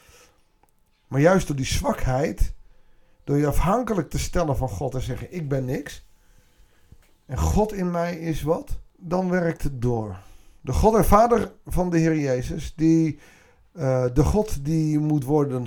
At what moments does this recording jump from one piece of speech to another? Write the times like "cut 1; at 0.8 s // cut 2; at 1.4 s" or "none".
cut 1; at 8.9 s